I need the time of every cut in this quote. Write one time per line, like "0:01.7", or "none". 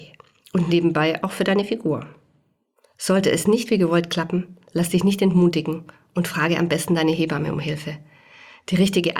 none